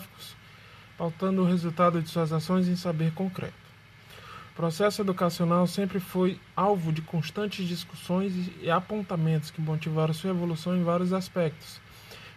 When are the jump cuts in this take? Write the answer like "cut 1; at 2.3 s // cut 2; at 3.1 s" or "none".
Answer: none

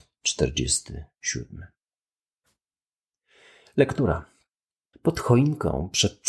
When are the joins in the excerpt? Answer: cut 1; at 4.9 s

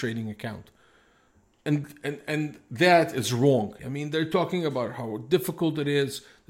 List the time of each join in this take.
cut 1; at 3.8 s

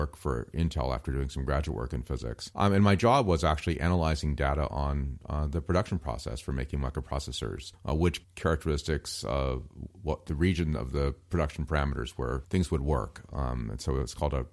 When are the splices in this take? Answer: none

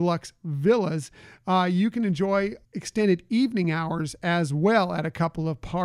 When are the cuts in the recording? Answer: cut 1; at 2.7 s

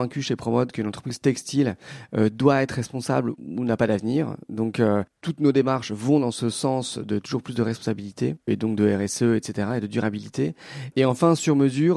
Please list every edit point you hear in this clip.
none

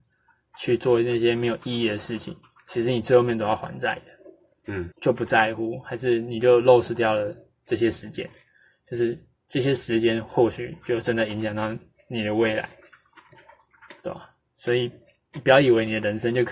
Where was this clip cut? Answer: cut 1; at 4.9 s

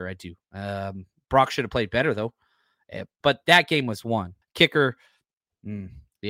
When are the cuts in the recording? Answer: cut 1; at 3.2 s // cut 2; at 4.4 s

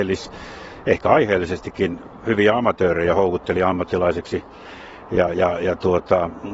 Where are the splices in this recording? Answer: none

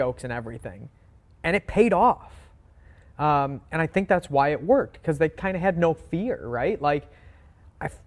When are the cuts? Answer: none

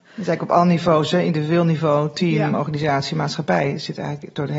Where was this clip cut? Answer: none

